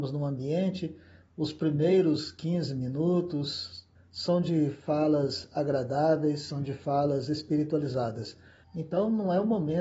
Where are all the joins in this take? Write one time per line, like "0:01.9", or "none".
0:04.0
0:08.6